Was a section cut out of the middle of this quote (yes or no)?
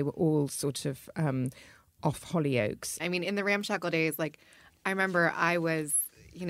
yes